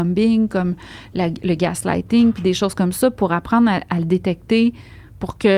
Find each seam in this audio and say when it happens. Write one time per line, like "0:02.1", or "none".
none